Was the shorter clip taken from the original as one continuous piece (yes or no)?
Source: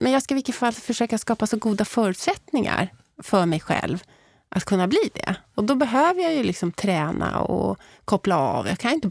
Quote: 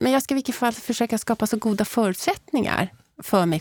yes